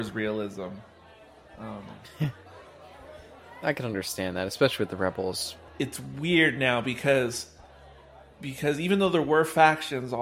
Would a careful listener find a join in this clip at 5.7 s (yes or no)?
yes